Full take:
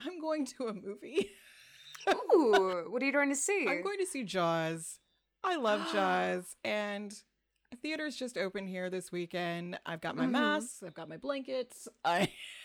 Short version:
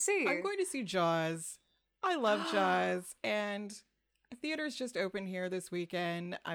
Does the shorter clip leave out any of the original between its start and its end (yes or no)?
no